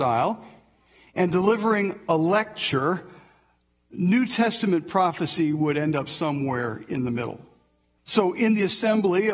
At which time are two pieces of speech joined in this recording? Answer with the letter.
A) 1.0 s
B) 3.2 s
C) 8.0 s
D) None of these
C